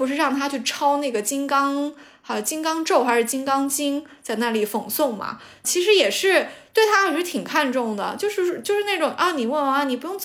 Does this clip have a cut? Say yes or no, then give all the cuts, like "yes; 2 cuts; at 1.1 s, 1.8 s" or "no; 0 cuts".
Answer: no; 0 cuts